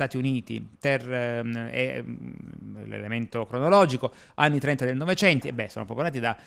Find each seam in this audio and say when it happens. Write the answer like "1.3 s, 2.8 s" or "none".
5.4 s